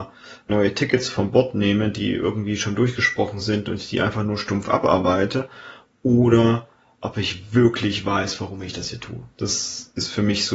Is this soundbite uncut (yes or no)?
yes